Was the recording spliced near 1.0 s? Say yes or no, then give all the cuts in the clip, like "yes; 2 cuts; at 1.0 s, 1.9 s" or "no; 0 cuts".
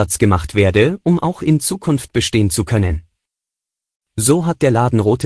no; 0 cuts